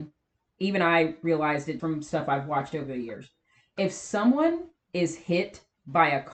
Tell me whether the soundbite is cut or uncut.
cut